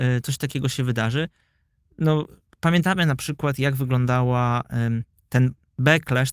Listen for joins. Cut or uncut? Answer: uncut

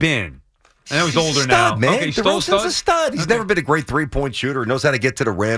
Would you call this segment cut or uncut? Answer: uncut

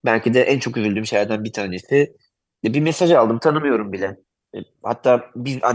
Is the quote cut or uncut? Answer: uncut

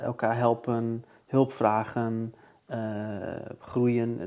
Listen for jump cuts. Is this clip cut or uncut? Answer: uncut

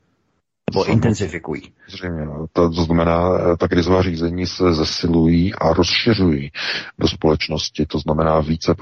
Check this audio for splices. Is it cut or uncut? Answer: uncut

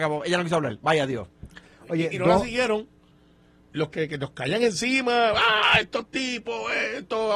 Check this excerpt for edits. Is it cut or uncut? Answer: cut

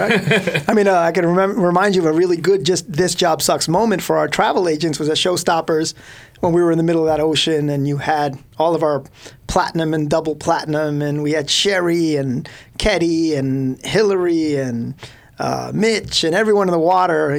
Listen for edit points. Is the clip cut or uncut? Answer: uncut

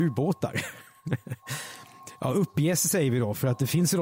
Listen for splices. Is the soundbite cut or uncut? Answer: uncut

